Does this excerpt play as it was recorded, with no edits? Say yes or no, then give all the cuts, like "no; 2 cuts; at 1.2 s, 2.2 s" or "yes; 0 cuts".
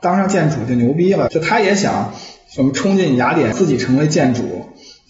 no; 2 cuts; at 1.3 s, 3.5 s